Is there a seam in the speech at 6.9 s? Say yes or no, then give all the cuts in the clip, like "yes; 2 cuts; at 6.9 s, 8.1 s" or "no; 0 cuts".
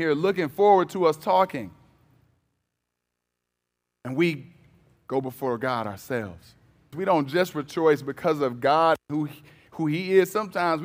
yes; 1 cut; at 6.9 s